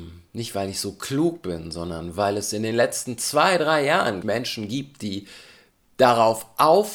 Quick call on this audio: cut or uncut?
cut